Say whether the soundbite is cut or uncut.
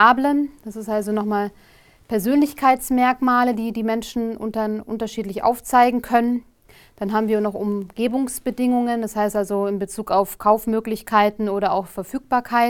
uncut